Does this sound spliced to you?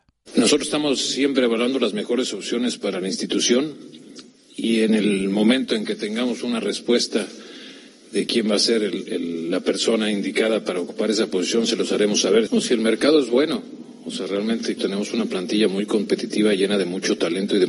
yes; 2 cuts; at 12.5 s, 14.8 s

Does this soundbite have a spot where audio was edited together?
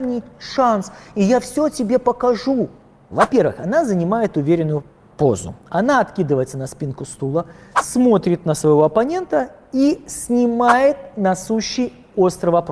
yes; 1 cut; at 3.1 s

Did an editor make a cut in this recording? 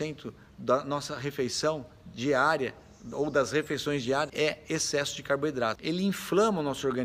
yes; 1 cut; at 5.8 s

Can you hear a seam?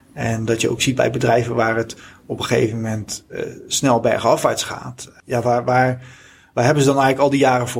no; 0 cuts

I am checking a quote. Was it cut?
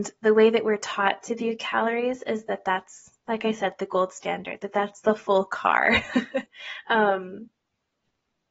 yes; 1 cut; at 6.5 s

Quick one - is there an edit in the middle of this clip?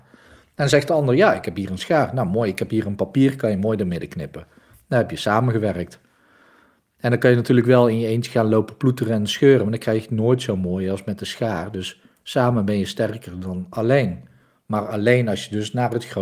no; 0 cuts

